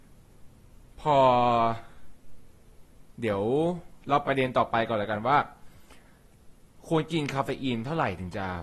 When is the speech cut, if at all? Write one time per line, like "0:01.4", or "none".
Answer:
0:04.2